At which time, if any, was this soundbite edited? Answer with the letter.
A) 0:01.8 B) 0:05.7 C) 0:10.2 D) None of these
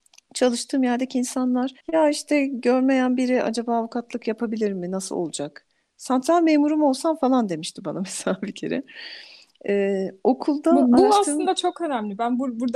A